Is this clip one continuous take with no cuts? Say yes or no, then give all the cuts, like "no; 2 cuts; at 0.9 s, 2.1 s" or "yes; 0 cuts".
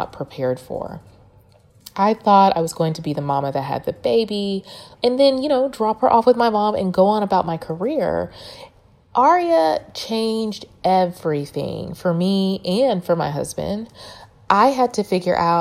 no; 1 cut; at 5.0 s